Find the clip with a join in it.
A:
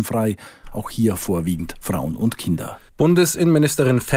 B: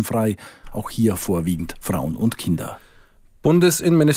A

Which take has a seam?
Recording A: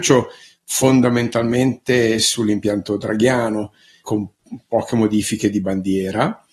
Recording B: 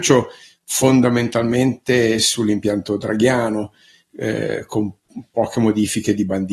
A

